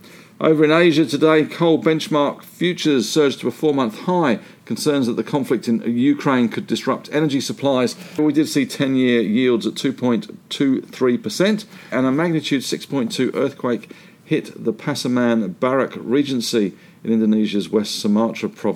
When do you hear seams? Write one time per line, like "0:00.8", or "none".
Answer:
0:08.2
0:11.9